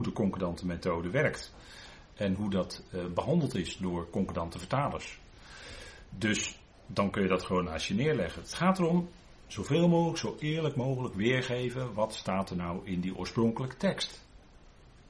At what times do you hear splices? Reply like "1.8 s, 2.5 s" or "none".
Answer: none